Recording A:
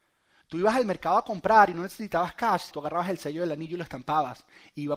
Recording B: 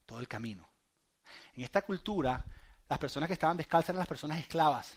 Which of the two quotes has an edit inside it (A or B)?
A